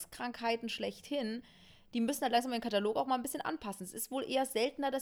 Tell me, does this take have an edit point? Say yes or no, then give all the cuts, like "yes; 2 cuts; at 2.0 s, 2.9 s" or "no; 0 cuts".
no; 0 cuts